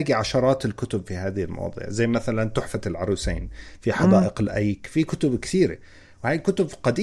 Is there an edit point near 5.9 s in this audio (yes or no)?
no